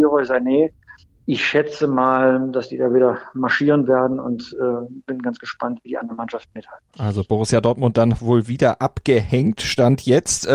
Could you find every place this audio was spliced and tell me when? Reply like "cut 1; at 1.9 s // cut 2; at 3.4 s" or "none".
cut 1; at 6.9 s